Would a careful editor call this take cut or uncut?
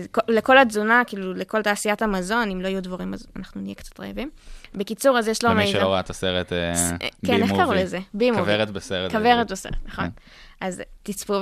uncut